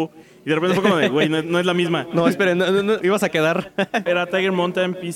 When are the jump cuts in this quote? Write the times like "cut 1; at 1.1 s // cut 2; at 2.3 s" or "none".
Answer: cut 1; at 3.0 s // cut 2; at 4.1 s